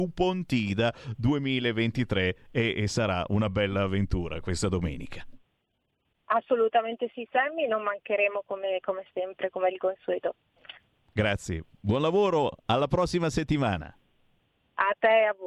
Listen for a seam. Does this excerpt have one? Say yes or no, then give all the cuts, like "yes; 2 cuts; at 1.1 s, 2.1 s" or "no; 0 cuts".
no; 0 cuts